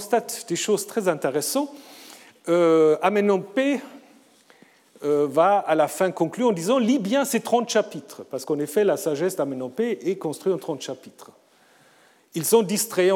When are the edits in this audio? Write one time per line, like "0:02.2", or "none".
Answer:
none